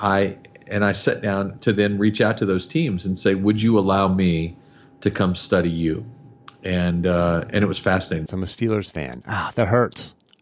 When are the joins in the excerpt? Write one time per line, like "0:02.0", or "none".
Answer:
0:08.3